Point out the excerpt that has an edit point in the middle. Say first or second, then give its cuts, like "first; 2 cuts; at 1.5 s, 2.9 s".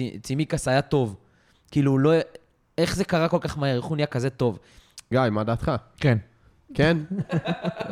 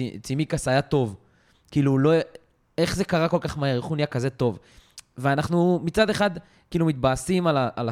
first; 1 cut; at 5.1 s